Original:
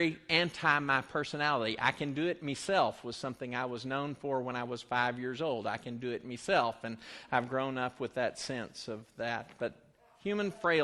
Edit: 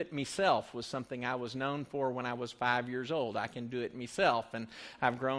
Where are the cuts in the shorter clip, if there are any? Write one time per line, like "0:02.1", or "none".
none